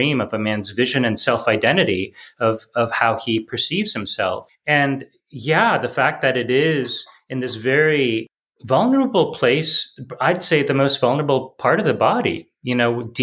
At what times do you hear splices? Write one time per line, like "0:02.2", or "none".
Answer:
none